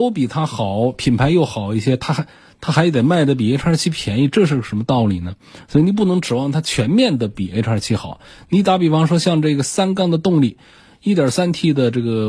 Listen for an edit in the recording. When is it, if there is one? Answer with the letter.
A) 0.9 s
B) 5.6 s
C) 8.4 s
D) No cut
D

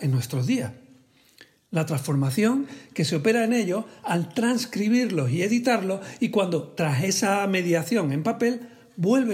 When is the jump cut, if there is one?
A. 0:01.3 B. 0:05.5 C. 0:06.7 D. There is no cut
D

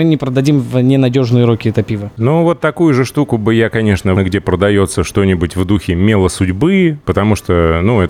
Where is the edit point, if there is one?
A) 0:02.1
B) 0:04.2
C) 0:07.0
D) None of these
B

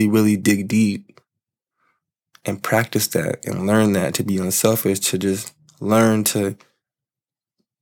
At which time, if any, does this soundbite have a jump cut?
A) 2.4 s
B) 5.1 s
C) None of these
C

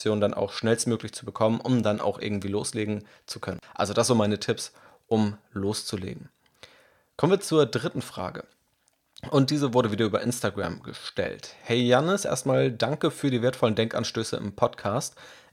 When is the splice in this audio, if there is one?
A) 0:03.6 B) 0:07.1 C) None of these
A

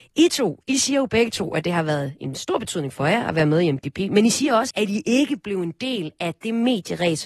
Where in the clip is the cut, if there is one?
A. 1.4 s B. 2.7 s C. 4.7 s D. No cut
C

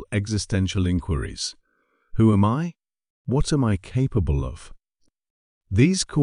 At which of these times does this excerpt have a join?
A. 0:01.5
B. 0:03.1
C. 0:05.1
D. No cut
B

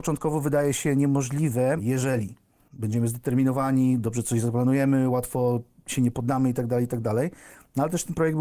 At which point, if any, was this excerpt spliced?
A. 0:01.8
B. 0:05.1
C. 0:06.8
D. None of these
A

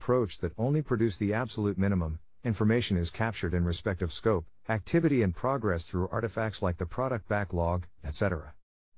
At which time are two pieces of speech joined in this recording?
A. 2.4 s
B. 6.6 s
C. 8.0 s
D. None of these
C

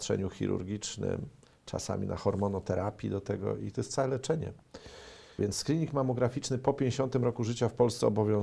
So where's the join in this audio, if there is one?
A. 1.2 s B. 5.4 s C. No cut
B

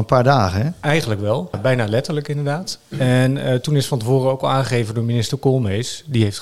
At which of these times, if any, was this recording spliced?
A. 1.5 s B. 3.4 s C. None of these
A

